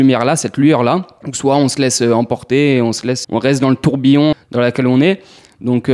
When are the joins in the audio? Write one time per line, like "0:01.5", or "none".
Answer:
0:03.2
0:04.3